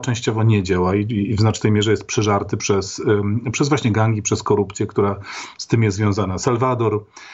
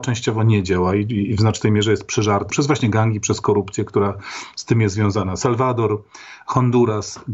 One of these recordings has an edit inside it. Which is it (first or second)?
second